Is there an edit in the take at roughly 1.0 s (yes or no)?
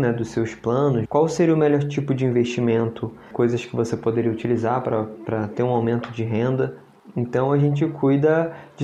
yes